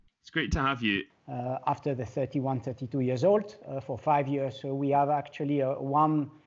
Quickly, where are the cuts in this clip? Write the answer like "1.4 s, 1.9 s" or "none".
1.1 s